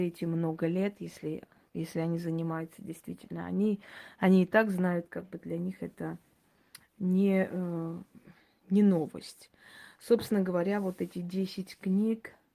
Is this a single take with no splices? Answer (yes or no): yes